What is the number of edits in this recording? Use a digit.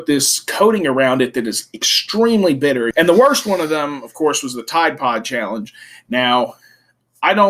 1